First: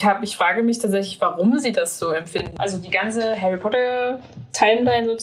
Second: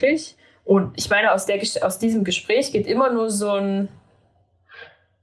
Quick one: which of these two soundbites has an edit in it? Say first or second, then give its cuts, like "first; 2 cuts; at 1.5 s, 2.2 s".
first; 1 cut; at 2.6 s